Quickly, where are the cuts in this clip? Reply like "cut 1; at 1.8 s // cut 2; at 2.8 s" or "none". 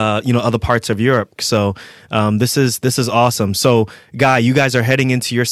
cut 1; at 1.4 s